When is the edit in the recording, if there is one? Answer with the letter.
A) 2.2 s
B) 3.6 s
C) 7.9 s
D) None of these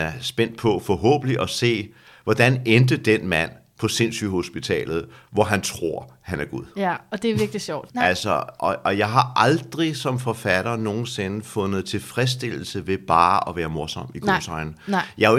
C